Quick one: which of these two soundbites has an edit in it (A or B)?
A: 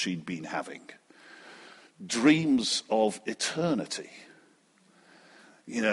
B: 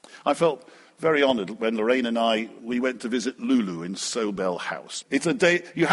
B